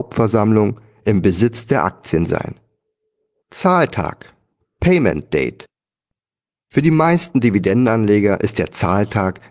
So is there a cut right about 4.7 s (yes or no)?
no